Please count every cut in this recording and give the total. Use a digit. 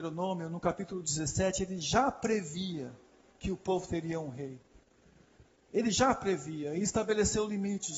0